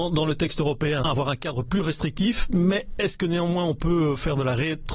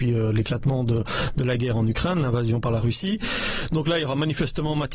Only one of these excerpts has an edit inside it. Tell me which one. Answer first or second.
first